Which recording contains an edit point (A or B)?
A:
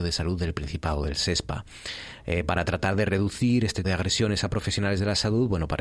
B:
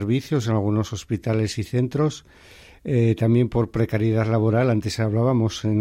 A